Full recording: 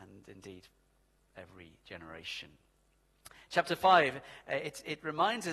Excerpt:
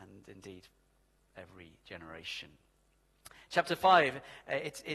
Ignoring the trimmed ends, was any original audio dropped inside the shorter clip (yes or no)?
no